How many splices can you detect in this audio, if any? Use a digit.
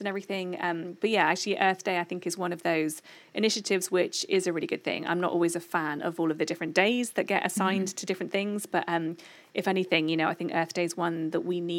0